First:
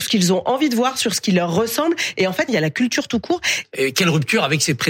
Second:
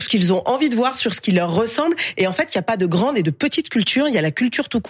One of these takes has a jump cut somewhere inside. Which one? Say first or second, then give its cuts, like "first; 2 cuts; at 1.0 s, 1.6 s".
first; 2 cuts; at 2.5 s, 3.6 s